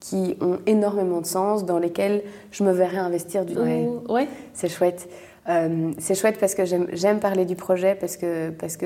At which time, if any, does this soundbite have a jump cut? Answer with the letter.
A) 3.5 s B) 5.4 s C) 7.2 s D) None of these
A